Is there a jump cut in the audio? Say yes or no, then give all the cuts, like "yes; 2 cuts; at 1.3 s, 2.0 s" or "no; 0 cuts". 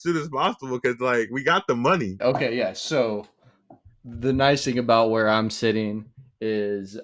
yes; 1 cut; at 2.2 s